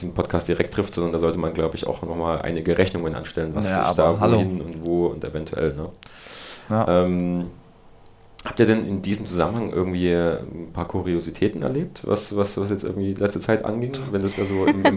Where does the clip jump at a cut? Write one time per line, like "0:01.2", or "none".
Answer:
none